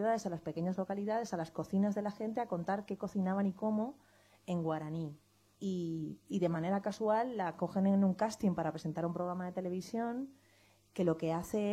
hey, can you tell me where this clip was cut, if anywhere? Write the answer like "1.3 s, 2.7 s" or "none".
5.6 s